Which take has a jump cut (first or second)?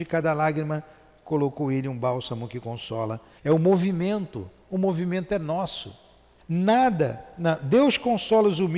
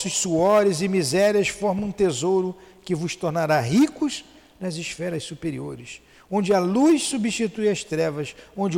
first